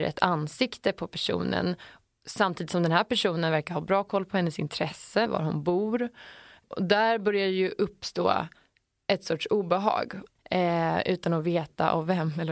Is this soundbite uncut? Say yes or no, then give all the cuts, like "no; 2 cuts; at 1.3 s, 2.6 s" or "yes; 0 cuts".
no; 2 cuts; at 5.3 s, 10.4 s